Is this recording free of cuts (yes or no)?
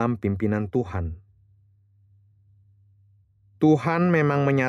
yes